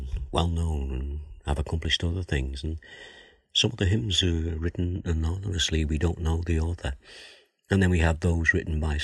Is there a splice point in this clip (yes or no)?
no